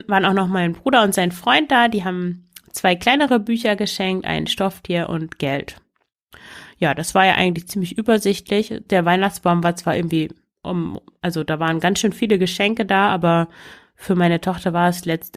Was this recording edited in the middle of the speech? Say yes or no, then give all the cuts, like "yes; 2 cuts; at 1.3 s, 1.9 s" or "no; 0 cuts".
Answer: no; 0 cuts